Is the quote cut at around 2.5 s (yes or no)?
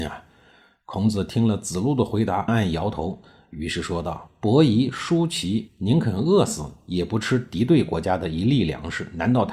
yes